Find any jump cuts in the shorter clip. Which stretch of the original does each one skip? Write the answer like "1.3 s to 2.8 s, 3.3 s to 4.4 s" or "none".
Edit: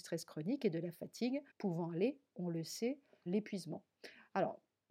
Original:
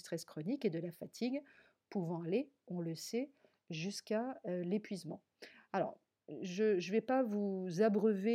1.5 s to 1.8 s, 3.6 s to 4.6 s